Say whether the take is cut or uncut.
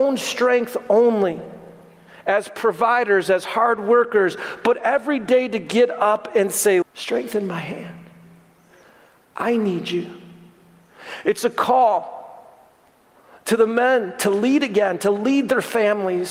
cut